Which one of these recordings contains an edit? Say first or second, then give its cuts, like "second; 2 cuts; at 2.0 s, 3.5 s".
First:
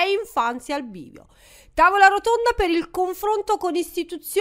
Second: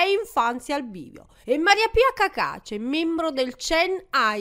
second; 1 cut; at 1.4 s